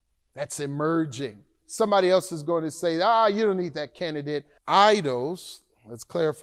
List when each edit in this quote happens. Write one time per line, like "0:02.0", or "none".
0:01.6
0:04.6